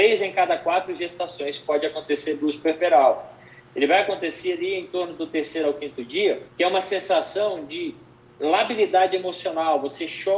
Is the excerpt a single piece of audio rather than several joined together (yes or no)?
no